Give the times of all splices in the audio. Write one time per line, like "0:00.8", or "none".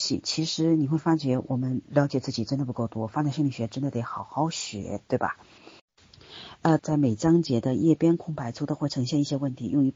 0:06.8